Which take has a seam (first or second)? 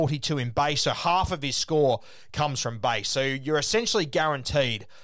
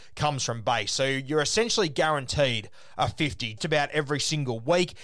second